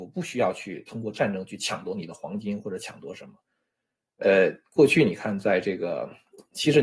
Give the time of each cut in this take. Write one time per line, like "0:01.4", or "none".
none